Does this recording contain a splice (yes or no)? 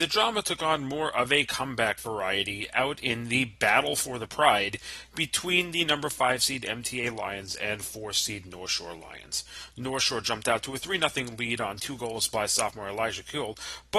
no